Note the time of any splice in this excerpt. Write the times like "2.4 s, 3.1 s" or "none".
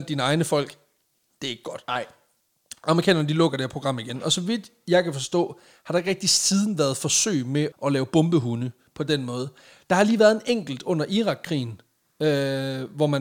7.7 s